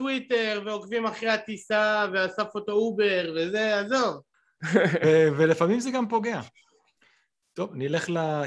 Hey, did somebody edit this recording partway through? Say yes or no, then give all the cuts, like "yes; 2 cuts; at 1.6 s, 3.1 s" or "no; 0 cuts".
yes; 1 cut; at 4.3 s